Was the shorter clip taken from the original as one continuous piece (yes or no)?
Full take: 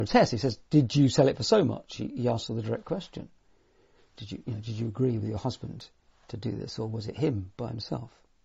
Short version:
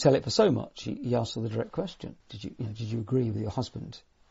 no